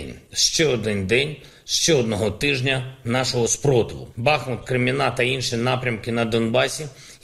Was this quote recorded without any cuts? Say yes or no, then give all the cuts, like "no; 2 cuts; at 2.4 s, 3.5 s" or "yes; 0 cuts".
no; 1 cut; at 4.1 s